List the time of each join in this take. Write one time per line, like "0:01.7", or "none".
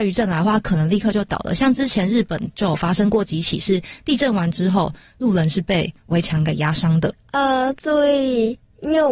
0:07.1